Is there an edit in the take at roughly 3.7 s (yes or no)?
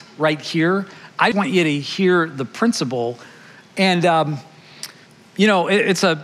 no